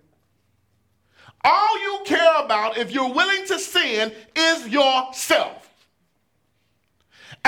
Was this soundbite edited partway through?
no; 0 cuts

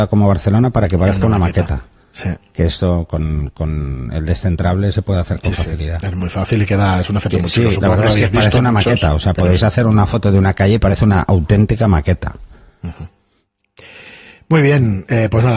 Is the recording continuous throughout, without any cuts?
yes; 0 cuts

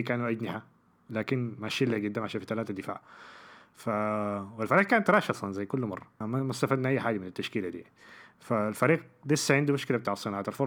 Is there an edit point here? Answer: yes; 1 cut; at 6.2 s

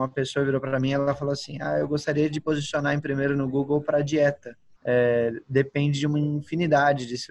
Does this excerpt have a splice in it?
yes; 1 cut; at 4.7 s

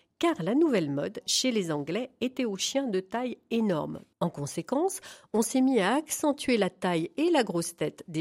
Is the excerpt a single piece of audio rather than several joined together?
no; 1 cut; at 4.1 s

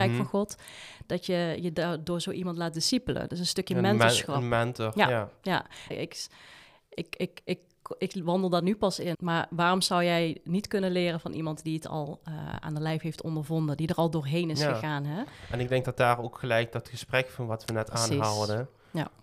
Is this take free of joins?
no; 2 cuts; at 5.9 s, 9.1 s

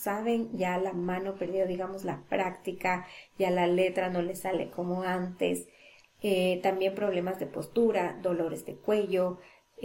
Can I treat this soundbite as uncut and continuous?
no; 1 cut; at 6.0 s

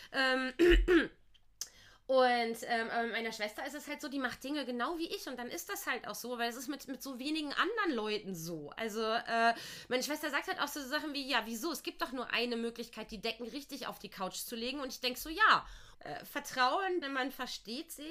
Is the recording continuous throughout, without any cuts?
no; 2 cuts; at 15.9 s, 17.0 s

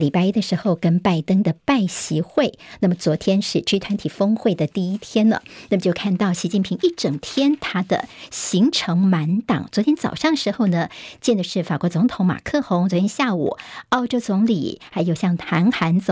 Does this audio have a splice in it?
no; 0 cuts

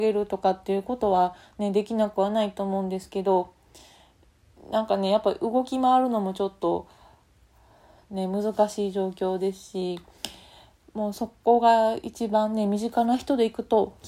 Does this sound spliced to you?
no; 0 cuts

